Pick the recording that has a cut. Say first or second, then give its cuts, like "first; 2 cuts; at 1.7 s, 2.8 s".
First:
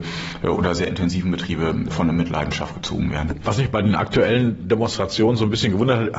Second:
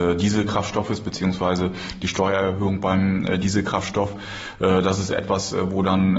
first; 1 cut; at 1.9 s